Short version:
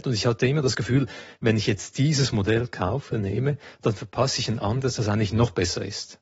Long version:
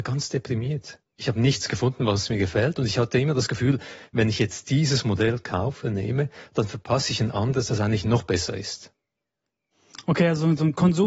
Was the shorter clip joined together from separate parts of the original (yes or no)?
no